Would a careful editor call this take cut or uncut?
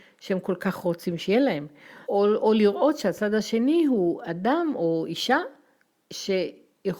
cut